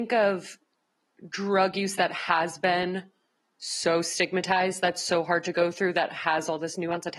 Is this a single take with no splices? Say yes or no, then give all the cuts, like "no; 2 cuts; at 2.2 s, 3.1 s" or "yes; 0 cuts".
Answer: yes; 0 cuts